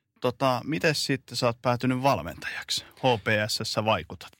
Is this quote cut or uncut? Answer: uncut